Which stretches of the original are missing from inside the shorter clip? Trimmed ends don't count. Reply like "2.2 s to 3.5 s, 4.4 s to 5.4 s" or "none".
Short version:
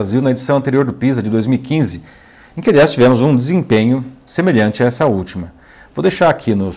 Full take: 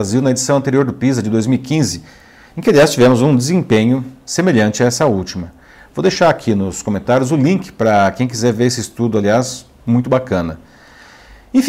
none